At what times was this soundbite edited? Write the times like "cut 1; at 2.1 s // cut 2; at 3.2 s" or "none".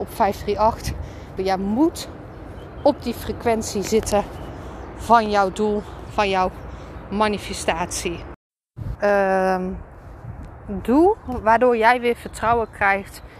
cut 1; at 1.4 s // cut 2; at 9.0 s